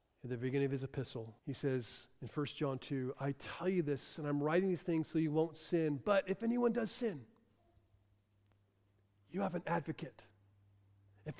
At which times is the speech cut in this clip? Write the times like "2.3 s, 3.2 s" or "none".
1.4 s